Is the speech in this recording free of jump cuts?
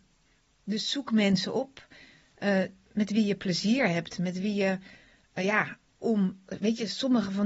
yes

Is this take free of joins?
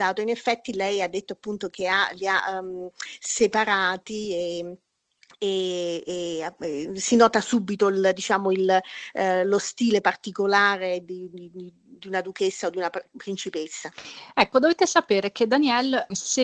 yes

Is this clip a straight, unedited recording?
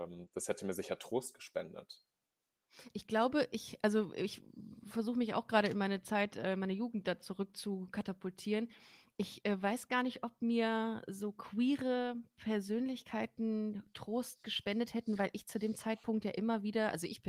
yes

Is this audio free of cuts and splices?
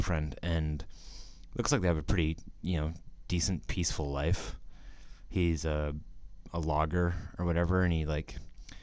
yes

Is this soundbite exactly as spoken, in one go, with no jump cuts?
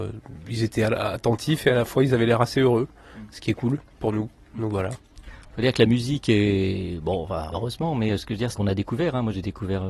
no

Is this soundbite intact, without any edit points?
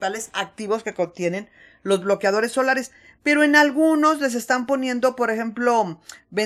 yes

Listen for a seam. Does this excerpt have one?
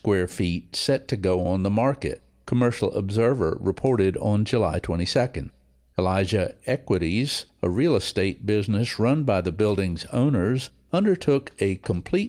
no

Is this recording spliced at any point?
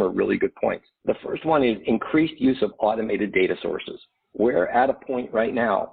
no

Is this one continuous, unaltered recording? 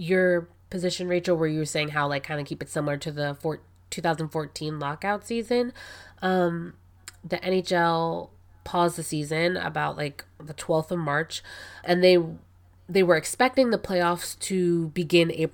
no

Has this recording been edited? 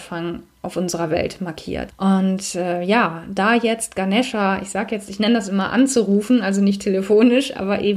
yes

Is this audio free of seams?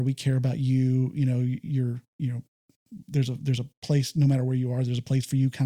yes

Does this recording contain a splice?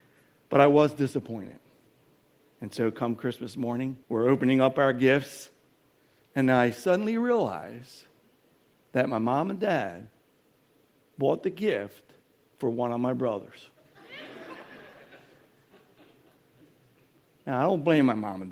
yes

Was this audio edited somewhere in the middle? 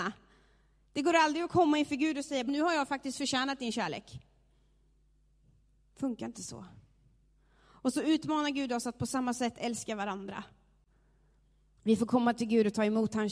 yes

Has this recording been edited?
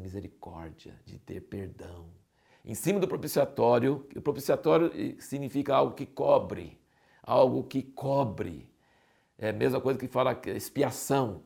yes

